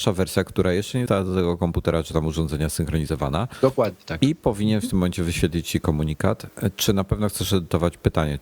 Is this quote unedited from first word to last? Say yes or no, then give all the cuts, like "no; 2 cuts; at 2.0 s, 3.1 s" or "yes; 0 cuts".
no; 1 cut; at 1.1 s